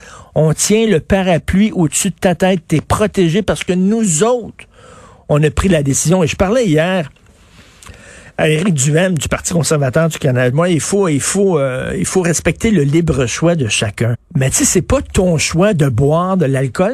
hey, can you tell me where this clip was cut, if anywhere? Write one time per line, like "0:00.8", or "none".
0:10.5
0:14.1